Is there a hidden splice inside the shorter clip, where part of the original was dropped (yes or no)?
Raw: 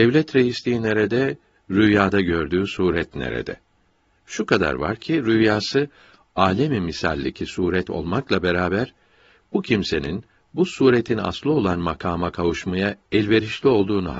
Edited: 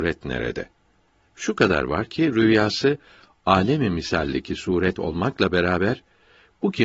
no